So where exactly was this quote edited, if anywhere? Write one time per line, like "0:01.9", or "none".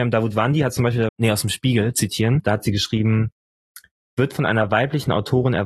0:01.1